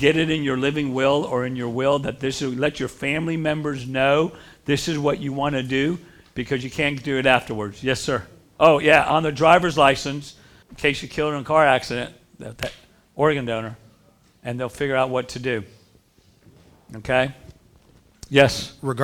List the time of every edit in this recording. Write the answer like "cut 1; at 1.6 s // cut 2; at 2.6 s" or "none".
cut 1; at 10.6 s